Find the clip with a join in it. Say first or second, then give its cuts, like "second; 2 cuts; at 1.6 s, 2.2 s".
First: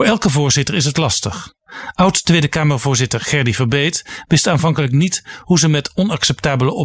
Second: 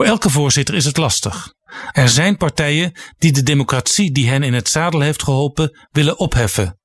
second; 1 cut; at 1.9 s